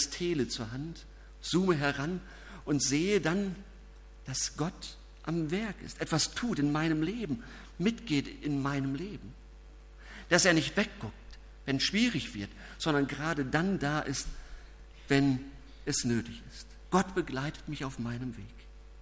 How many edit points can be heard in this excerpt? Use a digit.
0